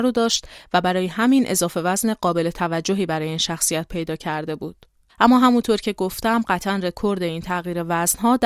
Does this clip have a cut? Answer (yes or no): yes